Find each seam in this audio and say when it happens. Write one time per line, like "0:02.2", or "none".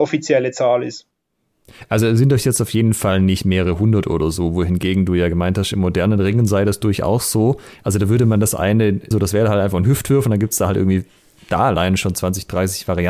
0:09.1